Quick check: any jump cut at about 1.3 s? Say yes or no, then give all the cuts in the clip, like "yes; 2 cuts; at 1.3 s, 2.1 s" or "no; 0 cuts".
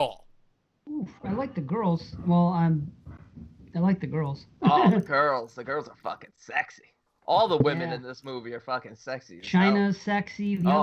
no; 0 cuts